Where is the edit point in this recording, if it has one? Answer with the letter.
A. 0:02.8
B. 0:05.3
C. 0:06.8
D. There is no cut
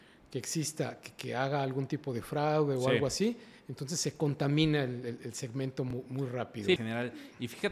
C